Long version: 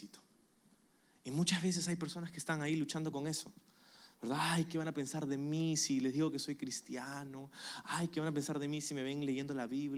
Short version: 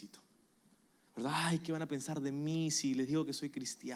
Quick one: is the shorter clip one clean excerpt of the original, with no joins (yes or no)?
no